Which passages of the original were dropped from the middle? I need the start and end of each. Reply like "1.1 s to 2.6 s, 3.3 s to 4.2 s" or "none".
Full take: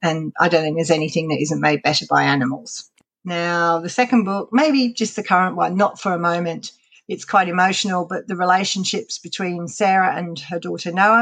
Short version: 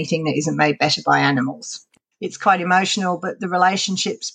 3.2 s to 7.0 s